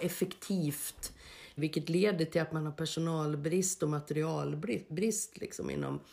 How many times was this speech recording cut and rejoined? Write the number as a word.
one